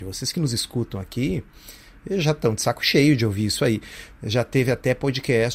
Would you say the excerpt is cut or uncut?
uncut